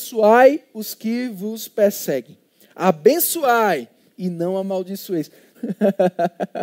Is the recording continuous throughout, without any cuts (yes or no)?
no